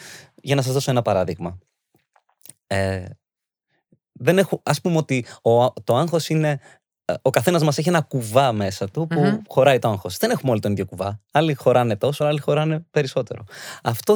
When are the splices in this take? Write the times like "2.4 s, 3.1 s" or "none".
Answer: 12.2 s

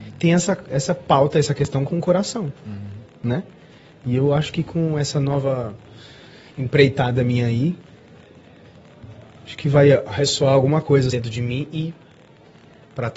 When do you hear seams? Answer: 11.1 s

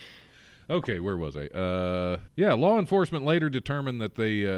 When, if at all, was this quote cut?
2.3 s

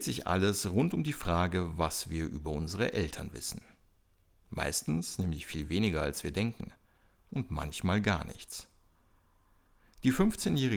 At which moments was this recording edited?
none

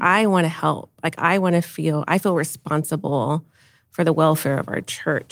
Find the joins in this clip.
none

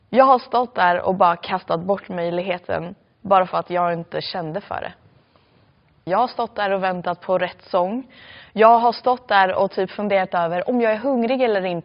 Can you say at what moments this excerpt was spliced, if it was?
6.1 s

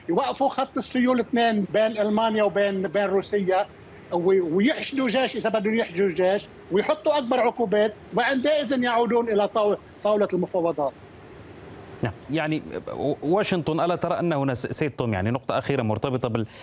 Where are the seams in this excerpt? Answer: 1.6 s, 12.3 s

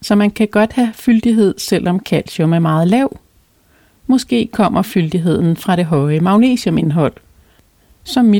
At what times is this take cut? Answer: none

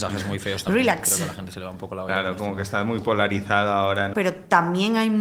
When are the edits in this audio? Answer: 4.1 s

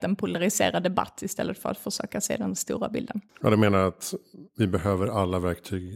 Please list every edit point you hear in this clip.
3.3 s

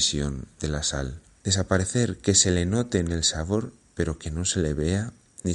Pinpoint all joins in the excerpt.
1.4 s

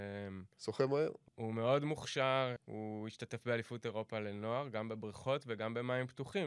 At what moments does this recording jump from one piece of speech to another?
1.3 s, 2.6 s

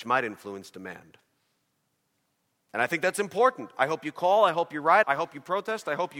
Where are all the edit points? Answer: 2.7 s, 5.0 s

